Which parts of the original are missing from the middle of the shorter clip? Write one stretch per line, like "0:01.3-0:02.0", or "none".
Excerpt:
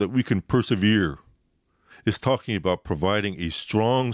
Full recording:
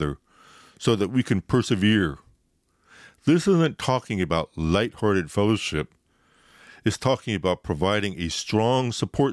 0:02.9-0:06.7